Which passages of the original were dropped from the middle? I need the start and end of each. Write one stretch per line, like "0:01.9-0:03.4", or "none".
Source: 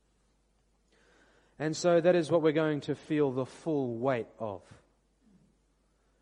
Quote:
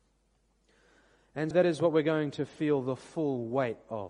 0:01.7-0:02.0

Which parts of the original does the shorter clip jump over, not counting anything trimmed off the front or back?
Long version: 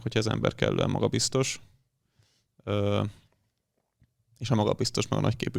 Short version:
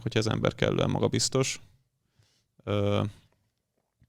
none

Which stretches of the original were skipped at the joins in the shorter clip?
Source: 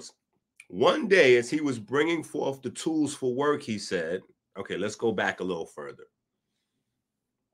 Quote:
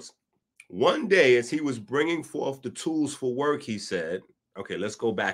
none

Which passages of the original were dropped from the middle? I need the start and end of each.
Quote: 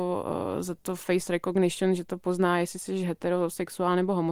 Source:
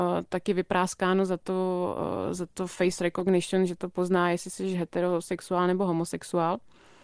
none

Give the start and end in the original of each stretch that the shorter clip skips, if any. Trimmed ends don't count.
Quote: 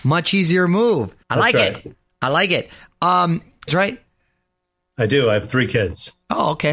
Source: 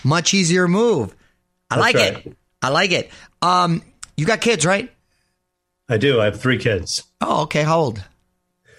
0:01.2-0:01.6
0:04.1-0:04.6

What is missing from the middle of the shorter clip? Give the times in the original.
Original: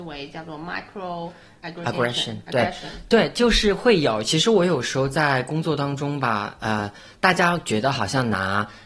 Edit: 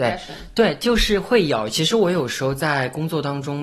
none

